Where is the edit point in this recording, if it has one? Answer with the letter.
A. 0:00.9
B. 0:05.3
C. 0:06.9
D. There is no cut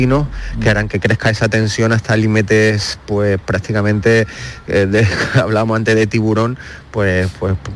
A